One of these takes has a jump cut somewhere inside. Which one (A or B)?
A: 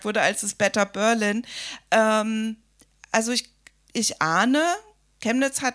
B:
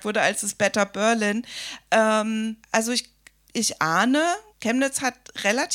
B